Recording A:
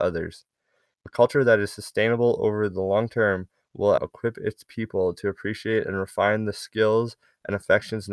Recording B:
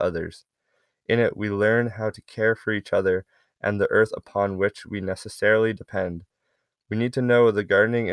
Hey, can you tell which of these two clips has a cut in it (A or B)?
A